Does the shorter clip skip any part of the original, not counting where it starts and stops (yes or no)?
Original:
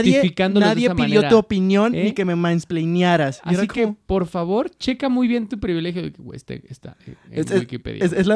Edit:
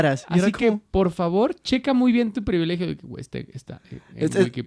no